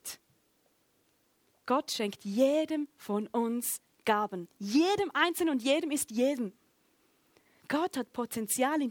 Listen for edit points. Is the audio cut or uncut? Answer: cut